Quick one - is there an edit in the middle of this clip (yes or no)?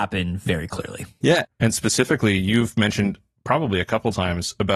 yes